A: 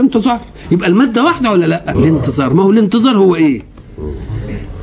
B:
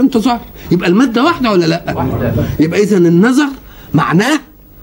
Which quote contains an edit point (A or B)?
A